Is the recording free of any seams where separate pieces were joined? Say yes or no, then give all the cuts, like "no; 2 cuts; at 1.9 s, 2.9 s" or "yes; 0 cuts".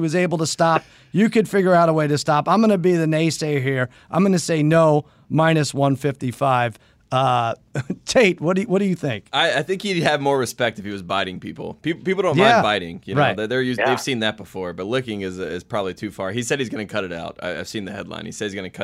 yes; 0 cuts